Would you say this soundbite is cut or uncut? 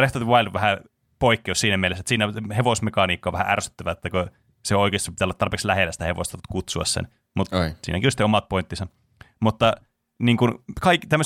uncut